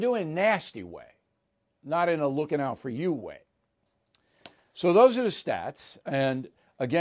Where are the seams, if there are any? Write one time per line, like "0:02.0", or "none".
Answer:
0:06.0